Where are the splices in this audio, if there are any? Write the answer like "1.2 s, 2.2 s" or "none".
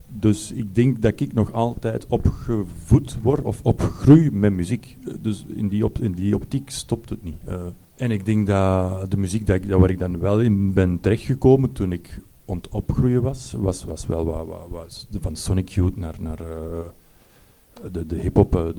7.8 s